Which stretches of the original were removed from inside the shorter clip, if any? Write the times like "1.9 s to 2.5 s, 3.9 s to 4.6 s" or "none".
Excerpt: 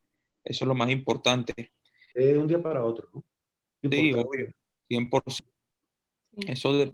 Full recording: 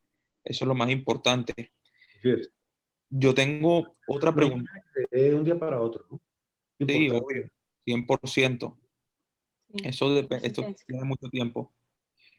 2.1 s to 5.1 s, 8.4 s to 8.8 s